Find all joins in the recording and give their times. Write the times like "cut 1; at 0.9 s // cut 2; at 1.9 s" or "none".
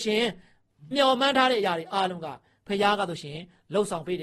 cut 1; at 0.9 s